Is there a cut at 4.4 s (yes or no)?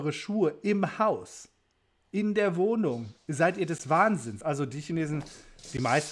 no